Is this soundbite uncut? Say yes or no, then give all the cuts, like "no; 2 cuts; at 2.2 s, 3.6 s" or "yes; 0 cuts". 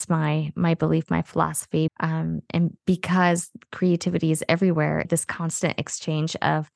no; 2 cuts; at 1.9 s, 5.0 s